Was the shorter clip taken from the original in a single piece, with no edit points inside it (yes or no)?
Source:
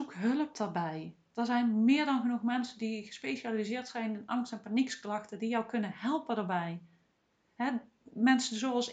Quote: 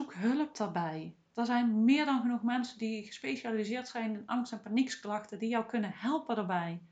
yes